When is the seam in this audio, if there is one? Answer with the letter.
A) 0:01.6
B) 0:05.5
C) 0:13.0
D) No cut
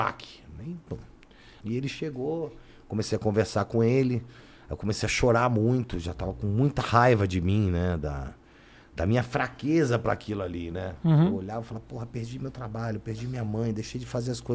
A